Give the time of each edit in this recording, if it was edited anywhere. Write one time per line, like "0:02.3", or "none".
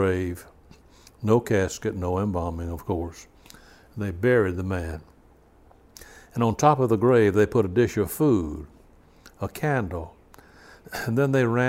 none